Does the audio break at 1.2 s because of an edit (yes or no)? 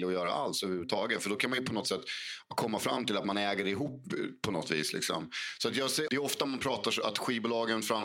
no